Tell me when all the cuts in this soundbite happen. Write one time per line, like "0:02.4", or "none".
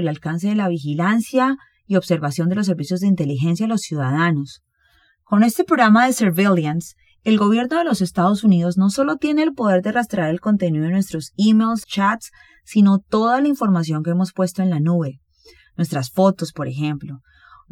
0:11.8